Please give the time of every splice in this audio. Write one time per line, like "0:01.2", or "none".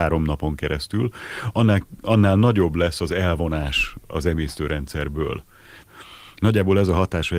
0:05.8